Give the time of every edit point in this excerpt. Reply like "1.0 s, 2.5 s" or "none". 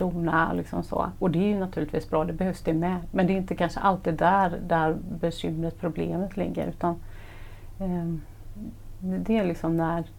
none